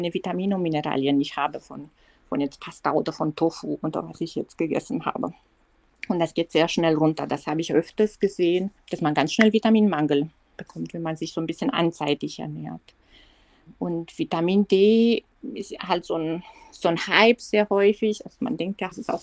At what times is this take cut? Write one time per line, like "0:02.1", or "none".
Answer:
none